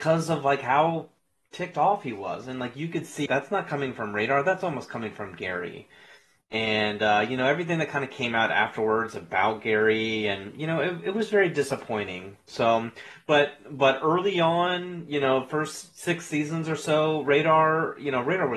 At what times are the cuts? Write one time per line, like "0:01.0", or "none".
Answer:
0:03.3